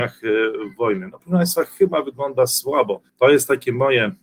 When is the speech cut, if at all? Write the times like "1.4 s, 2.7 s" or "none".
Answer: 3.1 s